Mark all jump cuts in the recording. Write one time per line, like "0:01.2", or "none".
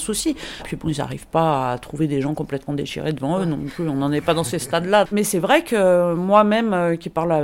0:05.1